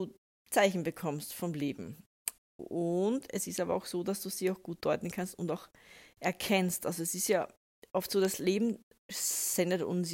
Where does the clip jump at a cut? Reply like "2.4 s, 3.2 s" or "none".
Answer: 2.4 s